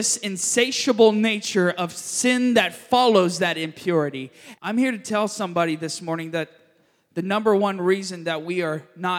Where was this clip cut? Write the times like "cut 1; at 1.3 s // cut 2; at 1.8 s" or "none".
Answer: cut 1; at 4.5 s

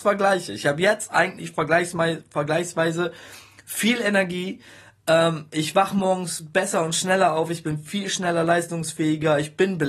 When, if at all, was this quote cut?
none

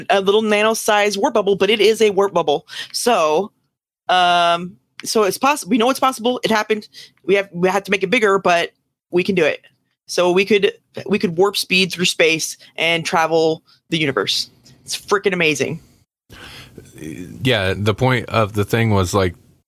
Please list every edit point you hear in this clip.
none

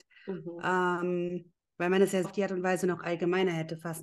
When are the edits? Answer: cut 1; at 2.2 s

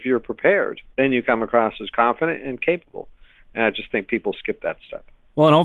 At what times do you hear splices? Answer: none

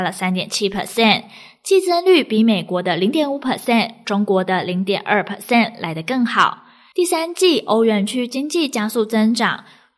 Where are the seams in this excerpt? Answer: none

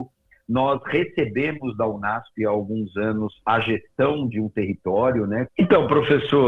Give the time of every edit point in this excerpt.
cut 1; at 5.5 s

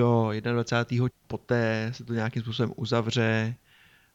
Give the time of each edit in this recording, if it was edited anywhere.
cut 1; at 1.1 s

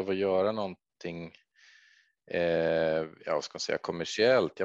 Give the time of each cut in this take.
none

